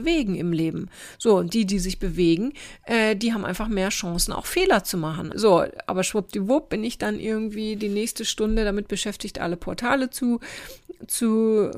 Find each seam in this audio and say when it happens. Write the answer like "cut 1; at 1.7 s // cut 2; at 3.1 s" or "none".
cut 1; at 5.3 s